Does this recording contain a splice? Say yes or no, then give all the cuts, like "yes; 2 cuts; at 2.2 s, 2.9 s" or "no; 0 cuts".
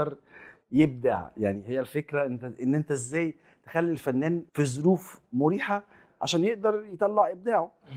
yes; 1 cut; at 4.5 s